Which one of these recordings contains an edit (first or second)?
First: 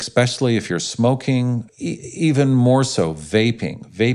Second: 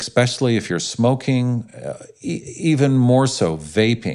first